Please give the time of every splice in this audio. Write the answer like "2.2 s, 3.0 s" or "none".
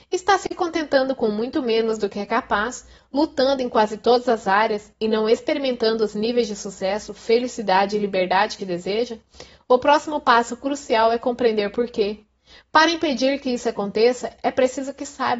8.6 s